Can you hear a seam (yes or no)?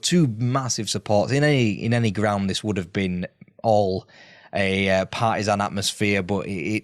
no